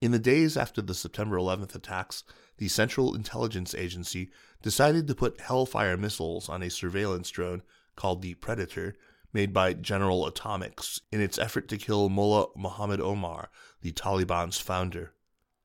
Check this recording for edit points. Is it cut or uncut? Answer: uncut